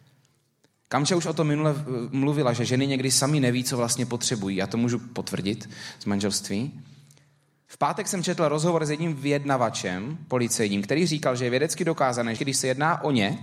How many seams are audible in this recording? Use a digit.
2